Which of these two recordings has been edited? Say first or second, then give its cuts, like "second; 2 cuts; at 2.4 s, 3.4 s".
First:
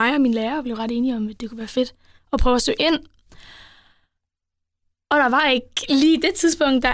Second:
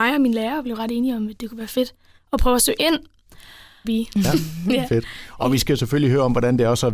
second; 1 cut; at 3.8 s